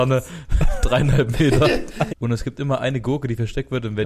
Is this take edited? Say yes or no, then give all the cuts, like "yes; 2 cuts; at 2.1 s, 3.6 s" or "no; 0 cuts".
yes; 1 cut; at 2.1 s